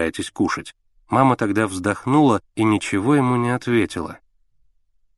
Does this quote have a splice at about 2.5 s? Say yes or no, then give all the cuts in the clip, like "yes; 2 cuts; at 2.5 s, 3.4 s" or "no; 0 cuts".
yes; 2 cuts; at 0.9 s, 2.5 s